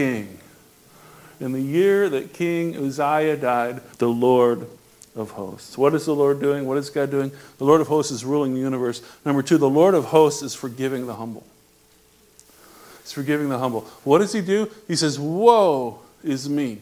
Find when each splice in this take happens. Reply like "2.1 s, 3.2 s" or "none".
3.9 s